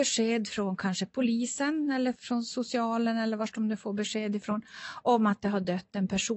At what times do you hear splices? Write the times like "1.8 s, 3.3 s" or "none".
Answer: 2.1 s